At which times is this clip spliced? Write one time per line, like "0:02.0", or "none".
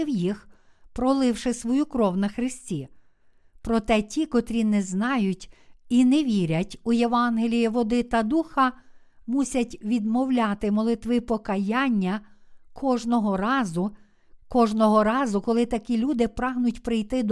0:14.4